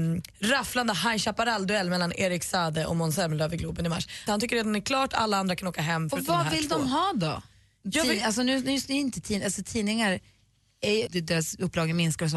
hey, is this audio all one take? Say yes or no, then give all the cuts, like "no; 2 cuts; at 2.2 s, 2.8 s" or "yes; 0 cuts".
no; 2 cuts; at 4.3 s, 11.1 s